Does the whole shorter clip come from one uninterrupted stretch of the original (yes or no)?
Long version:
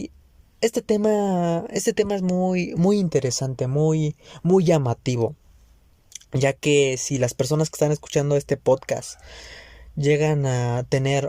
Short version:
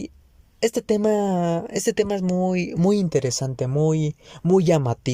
yes